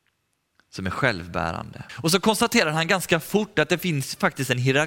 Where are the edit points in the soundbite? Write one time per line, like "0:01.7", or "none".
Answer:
0:01.9